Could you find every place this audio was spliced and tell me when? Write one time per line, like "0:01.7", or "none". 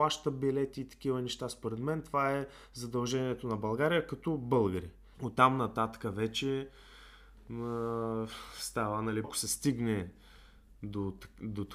0:05.1
0:09.2